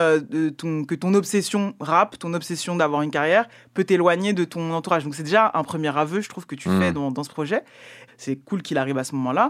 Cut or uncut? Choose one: cut